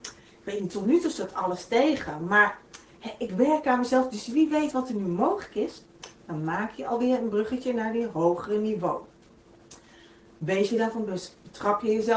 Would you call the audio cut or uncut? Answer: uncut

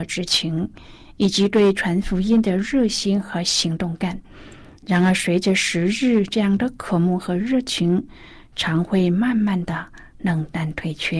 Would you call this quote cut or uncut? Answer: uncut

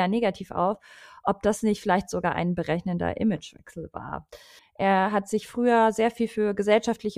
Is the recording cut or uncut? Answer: cut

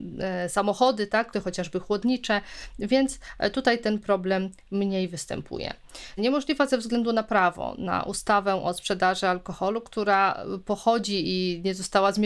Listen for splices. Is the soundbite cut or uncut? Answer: cut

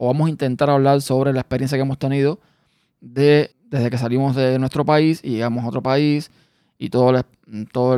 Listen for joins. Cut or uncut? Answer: cut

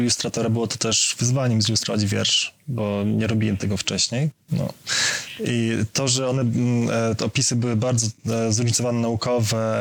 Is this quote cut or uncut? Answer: cut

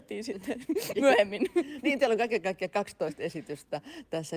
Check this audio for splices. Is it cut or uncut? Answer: cut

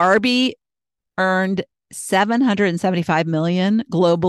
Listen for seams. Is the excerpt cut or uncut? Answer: cut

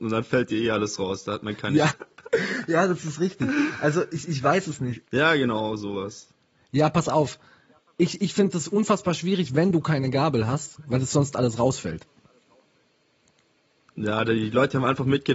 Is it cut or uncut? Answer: cut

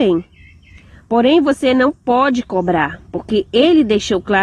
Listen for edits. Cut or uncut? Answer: uncut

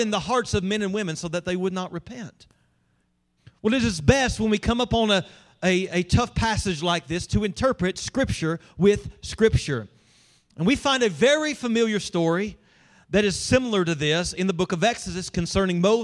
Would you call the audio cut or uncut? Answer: uncut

